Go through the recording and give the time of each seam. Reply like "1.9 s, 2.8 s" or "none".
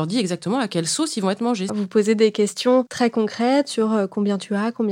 1.7 s